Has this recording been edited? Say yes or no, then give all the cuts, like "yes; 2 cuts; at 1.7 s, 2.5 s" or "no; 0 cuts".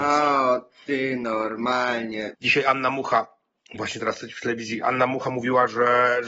yes; 1 cut; at 2.3 s